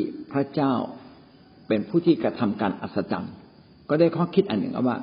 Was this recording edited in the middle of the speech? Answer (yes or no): no